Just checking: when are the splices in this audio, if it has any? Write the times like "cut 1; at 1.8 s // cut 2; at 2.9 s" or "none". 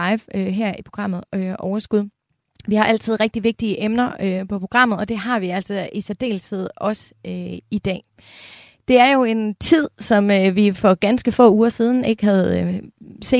none